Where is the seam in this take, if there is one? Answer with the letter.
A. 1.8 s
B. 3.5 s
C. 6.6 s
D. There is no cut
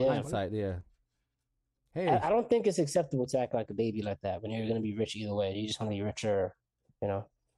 A